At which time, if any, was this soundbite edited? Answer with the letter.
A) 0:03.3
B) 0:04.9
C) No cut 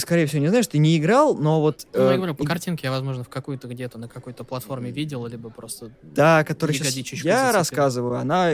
C